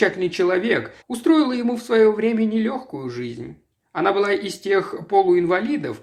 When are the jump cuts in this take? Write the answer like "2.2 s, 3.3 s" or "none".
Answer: 1.0 s